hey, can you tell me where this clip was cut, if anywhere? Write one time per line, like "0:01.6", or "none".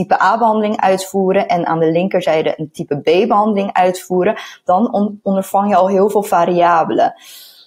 none